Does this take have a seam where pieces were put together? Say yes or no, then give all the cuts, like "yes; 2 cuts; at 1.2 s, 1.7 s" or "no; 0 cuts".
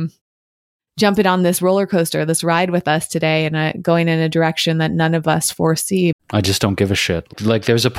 yes; 1 cut; at 6.1 s